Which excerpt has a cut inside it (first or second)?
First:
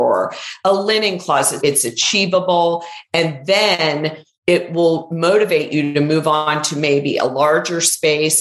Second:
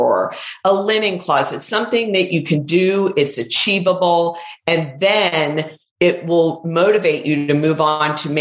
first